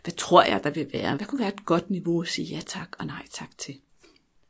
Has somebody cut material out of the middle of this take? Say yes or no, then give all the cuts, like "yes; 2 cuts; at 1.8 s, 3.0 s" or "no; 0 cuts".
yes; 1 cut; at 1.1 s